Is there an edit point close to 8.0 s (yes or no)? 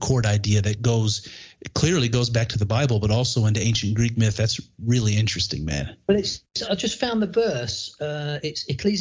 no